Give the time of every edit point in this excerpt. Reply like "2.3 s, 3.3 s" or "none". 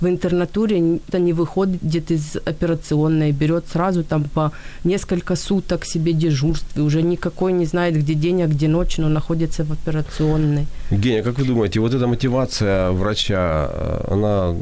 1.1 s